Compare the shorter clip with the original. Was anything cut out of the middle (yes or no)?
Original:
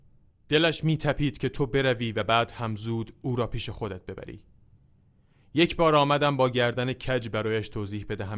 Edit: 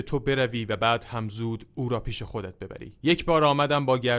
yes